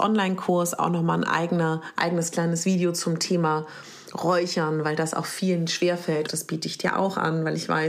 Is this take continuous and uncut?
no; 1 cut; at 6.3 s

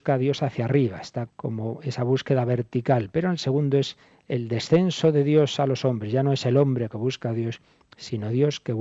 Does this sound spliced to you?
yes; 1 cut; at 1.3 s

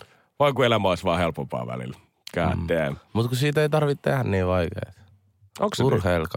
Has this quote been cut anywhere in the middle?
no; 0 cuts

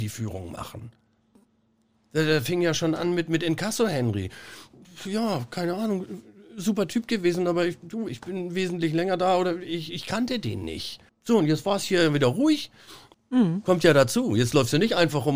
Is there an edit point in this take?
yes; 2 cuts; at 11.1 s, 13.1 s

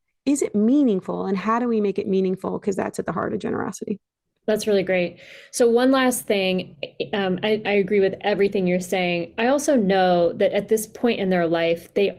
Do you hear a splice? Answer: yes; 1 cut; at 7.6 s

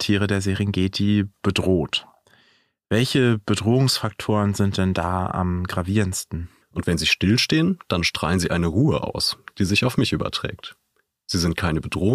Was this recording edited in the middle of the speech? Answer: yes; 1 cut; at 6.6 s

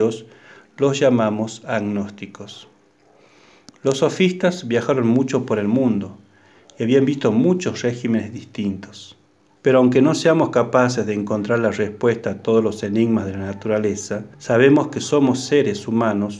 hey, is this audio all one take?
no; 2 cuts; at 9.6 s, 14.3 s

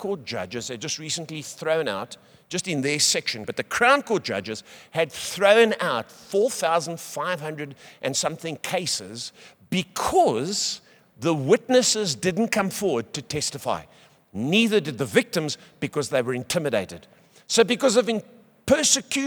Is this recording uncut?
no; 1 cut; at 3.4 s

